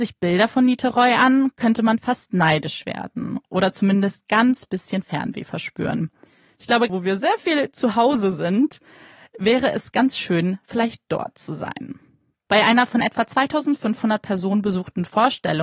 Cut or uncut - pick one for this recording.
cut